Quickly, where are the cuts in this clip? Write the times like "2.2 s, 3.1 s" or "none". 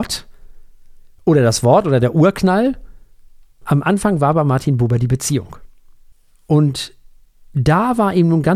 none